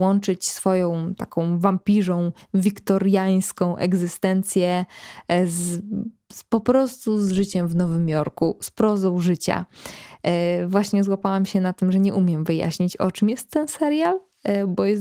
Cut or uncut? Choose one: uncut